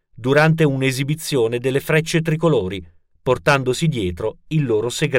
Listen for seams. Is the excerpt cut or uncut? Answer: uncut